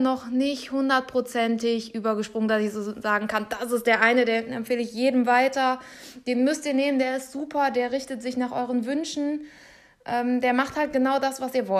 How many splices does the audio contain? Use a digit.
0